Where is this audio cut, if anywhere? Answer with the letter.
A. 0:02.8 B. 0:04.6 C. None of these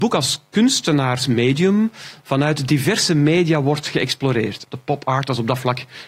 B